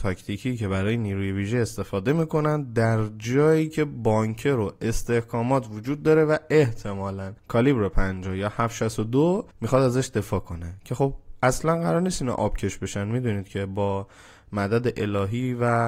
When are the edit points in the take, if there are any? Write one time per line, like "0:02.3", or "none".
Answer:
0:07.4
0:09.5